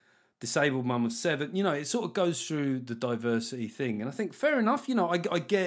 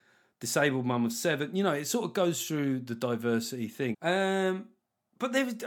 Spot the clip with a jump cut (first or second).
second